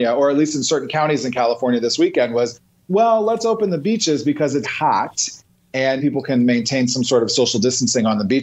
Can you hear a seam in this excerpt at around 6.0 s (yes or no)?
yes